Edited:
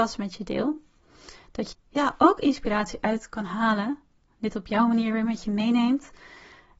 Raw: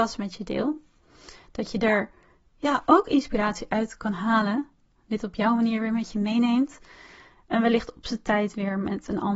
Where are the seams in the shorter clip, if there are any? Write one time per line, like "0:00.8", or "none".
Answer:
0:01.7